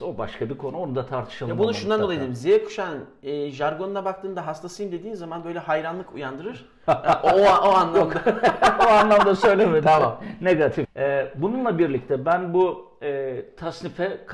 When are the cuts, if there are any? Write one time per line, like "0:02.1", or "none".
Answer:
0:10.8